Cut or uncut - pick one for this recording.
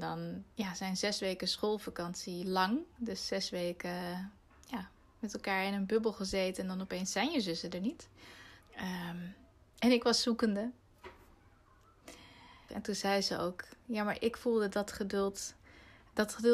cut